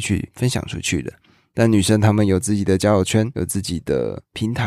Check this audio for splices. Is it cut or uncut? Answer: uncut